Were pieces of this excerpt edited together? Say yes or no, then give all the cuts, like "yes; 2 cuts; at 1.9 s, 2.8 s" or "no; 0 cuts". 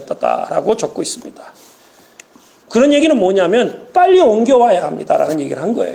yes; 1 cut; at 2.6 s